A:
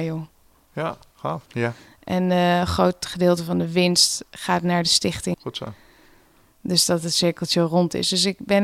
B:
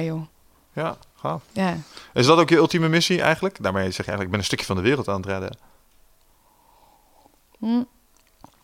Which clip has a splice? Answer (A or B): A